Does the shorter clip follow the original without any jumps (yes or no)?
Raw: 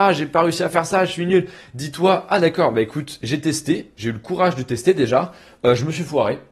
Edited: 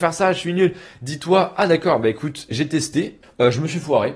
no